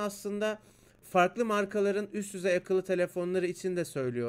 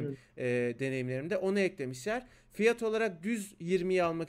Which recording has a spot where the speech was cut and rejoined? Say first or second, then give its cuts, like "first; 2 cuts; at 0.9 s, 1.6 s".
first; 1 cut; at 1.0 s